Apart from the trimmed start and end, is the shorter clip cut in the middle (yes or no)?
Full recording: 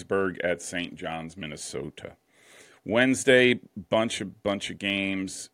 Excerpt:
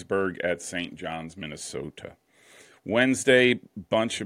no